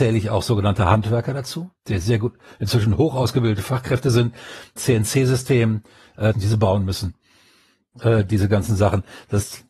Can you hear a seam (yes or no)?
yes